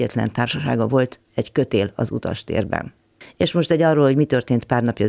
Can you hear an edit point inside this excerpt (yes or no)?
no